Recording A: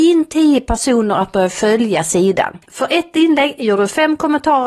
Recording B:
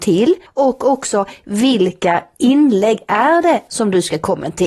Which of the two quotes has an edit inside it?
A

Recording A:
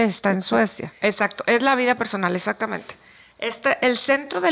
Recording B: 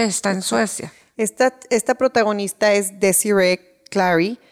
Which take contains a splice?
A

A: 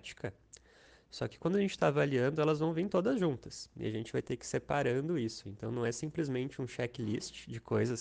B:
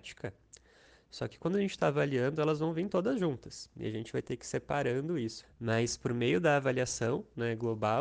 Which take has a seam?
B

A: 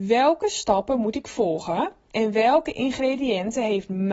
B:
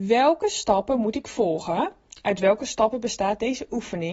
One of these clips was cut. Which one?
A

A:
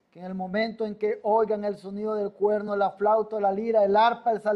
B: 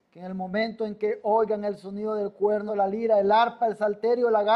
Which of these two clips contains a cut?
B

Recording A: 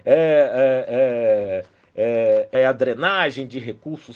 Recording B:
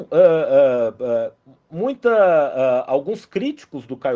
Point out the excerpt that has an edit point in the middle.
A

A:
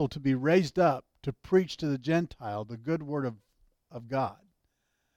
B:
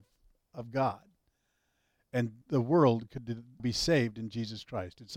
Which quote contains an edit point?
B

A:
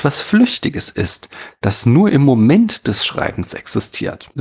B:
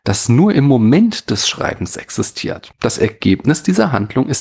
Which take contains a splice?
B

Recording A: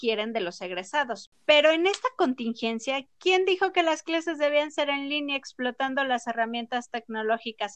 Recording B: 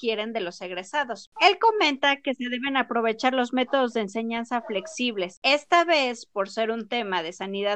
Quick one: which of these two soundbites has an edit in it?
B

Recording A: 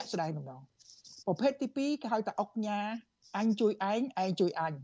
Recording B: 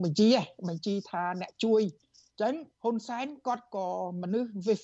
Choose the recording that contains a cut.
B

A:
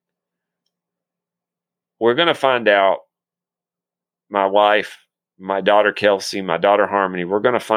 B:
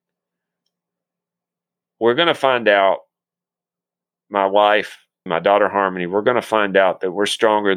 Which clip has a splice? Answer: B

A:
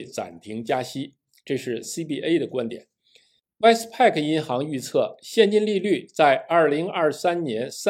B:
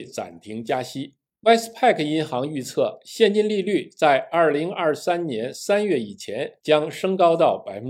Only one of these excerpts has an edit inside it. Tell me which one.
B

